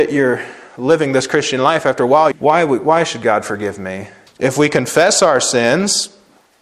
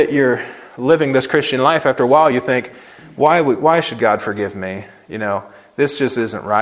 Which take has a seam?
first; 2 cuts; at 2.3 s, 4.3 s

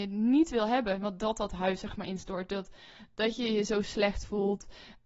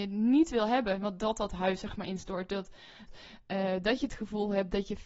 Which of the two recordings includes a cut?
second; 1 cut; at 3.1 s

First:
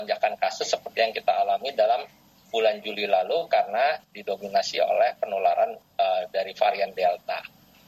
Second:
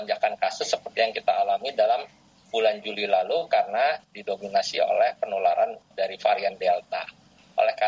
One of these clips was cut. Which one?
second; 1 cut; at 5.9 s

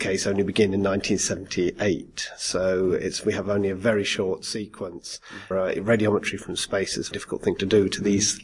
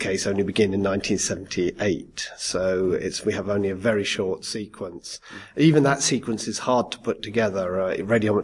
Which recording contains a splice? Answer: first; 2 cuts; at 5.5 s, 7.1 s

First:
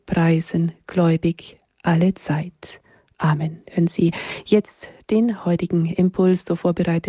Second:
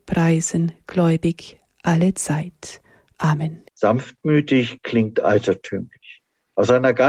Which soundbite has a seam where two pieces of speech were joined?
second; 1 cut; at 3.7 s

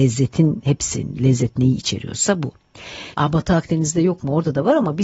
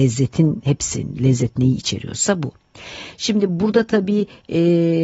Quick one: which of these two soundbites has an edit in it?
first; 1 cut; at 3.1 s

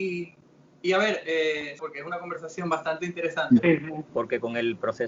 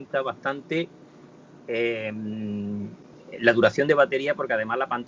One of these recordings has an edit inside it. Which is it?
first; 2 cuts; at 1.8 s, 4.1 s

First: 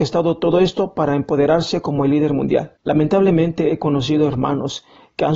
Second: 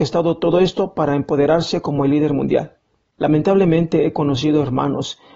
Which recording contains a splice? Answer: first; 1 cut; at 2.8 s

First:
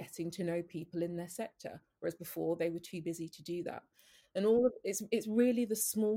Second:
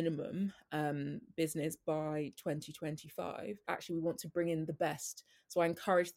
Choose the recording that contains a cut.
second; 1 cut; at 3.6 s

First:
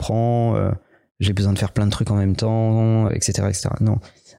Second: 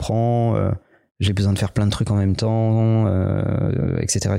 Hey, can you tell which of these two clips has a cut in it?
first; 1 cut; at 3.1 s

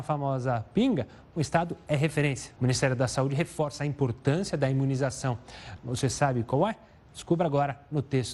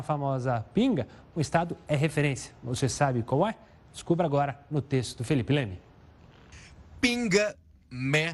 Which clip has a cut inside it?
first; 2 cuts; at 2.6 s, 5.8 s

